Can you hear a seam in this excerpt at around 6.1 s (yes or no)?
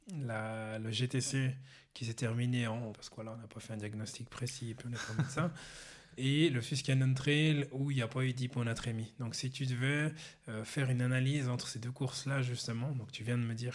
no